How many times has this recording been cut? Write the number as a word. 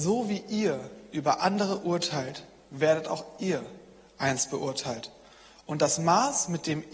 zero